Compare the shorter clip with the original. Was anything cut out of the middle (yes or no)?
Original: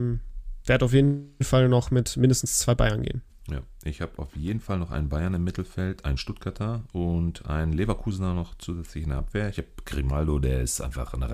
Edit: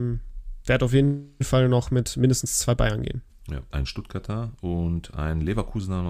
yes